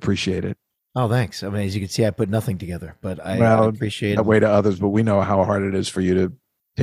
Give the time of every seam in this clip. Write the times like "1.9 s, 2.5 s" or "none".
4.2 s

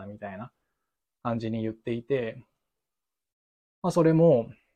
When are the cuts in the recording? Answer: none

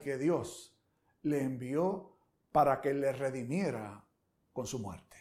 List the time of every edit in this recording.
none

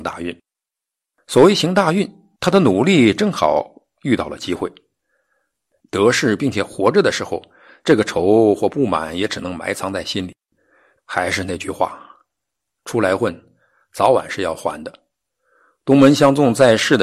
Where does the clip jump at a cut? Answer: 5.8 s, 11.0 s

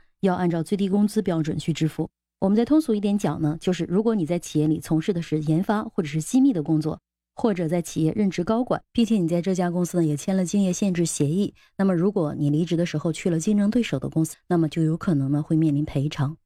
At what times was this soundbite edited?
8.9 s, 14.3 s

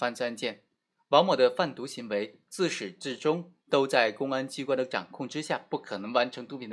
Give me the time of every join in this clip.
none

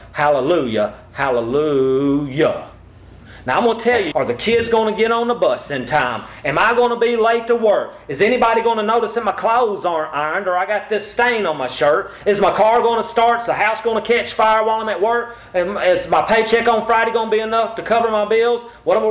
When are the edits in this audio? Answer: 4.1 s

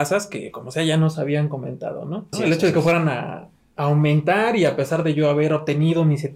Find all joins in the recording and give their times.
2.3 s

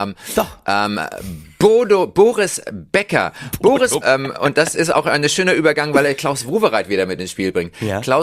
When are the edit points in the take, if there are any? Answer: 4.0 s

